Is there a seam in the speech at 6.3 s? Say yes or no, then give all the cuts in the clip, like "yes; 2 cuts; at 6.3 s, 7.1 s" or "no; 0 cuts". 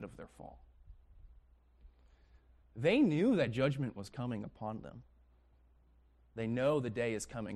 no; 1 cut; at 2.6 s